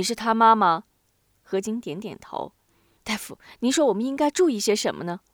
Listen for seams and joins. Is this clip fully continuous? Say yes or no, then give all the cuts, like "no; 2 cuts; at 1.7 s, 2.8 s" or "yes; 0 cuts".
no; 1 cut; at 2.7 s